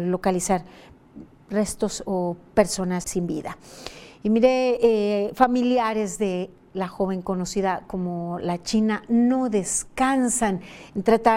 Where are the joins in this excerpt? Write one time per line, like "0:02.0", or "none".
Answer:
0:03.0